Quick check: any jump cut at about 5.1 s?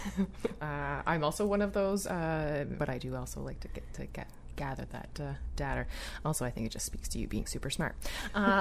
no; 1 cut; at 2.8 s

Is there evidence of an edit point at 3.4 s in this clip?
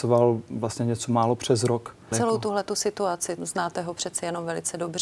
yes; 2 cuts; at 2.1 s, 3.4 s

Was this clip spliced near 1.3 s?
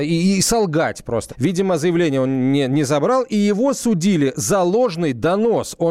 yes; 1 cut; at 1.3 s

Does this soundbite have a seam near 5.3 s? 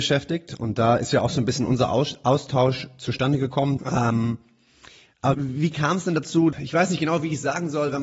yes; 3 cuts; at 3.8 s, 5.3 s, 6.5 s

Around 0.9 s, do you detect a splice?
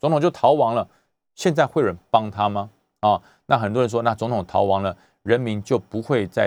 no; 0 cuts

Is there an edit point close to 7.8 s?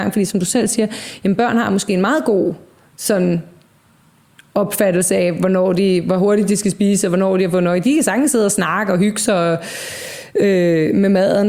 no; 0 cuts

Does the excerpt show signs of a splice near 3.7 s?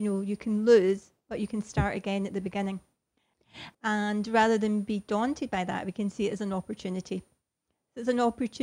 yes; 1 cut; at 3.7 s

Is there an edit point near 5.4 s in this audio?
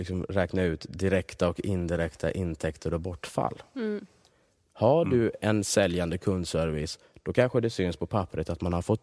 yes; 1 cut; at 5.4 s

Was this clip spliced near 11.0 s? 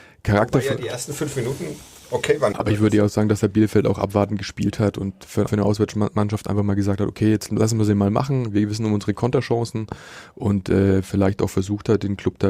no; 2 cuts; at 2.5 s, 5.5 s

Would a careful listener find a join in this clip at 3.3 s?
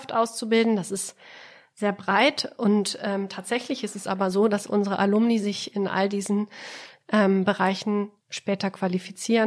no; 1 cut; at 8.2 s

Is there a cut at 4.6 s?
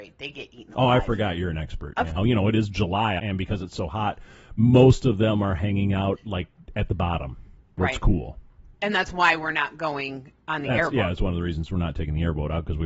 no; 2 cuts; at 2.2 s, 3.2 s

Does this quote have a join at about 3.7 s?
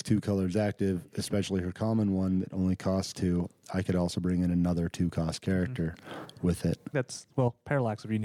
no; 1 cut; at 6.9 s

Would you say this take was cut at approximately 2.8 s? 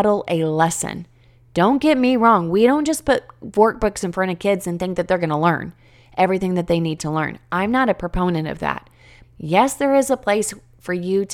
no; 1 cut; at 9.2 s

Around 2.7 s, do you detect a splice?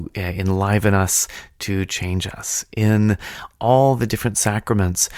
no; 0 cuts

